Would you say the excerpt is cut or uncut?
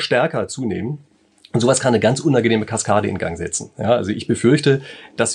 uncut